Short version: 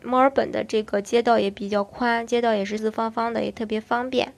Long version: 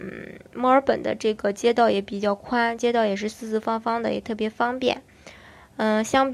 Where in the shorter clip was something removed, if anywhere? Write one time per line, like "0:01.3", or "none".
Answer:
0:02.8